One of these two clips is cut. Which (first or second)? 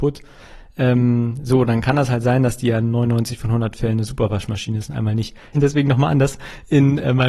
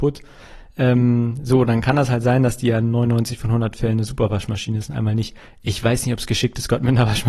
first